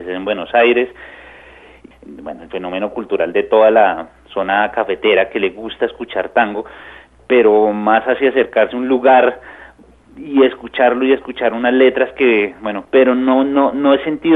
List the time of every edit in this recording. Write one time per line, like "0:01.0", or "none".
0:01.9
0:12.8

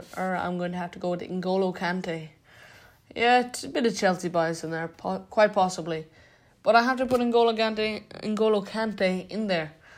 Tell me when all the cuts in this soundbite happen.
none

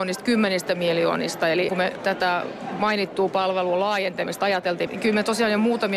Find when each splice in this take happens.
0:01.7
0:04.9

